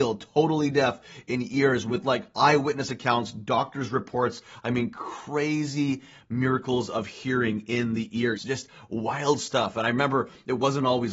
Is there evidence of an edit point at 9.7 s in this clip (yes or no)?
no